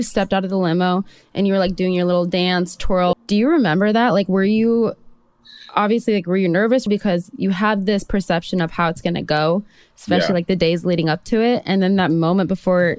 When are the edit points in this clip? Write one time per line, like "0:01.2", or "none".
0:03.1
0:06.9